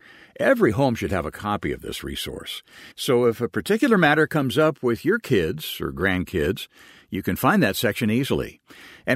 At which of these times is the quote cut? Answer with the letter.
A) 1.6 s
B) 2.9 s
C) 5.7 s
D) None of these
B